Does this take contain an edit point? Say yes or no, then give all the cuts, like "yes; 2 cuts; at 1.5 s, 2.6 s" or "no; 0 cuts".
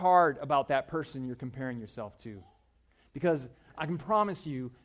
no; 0 cuts